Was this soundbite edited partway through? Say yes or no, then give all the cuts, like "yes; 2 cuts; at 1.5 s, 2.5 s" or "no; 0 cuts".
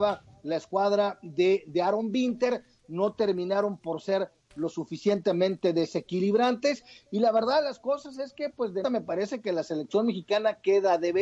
yes; 1 cut; at 8.8 s